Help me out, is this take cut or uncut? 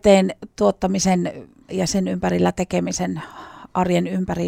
cut